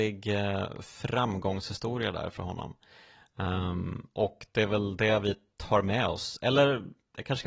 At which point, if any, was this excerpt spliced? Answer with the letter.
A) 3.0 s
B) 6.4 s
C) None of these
C